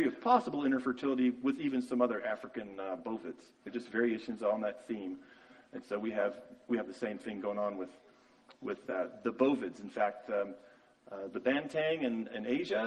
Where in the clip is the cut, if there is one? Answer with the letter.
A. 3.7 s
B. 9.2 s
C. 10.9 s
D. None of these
A